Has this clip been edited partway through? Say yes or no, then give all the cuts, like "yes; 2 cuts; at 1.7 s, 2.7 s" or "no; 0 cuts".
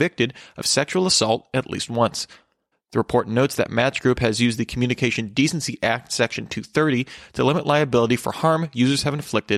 yes; 1 cut; at 2.7 s